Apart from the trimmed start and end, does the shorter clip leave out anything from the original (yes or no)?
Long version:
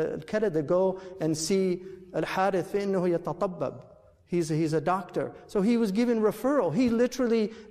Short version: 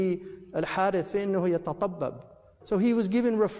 yes